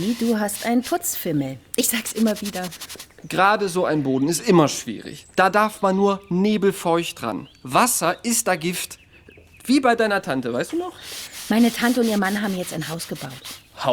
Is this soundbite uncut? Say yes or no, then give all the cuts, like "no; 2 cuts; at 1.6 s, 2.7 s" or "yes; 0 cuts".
yes; 0 cuts